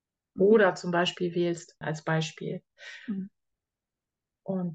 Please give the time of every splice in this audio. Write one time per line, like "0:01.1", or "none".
0:01.8